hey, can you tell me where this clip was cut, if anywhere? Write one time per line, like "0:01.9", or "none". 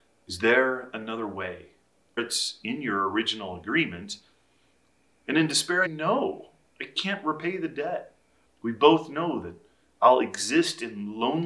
0:02.2
0:05.9
0:08.4